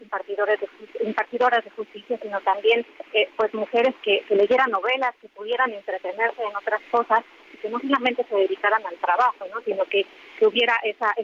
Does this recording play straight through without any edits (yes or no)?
yes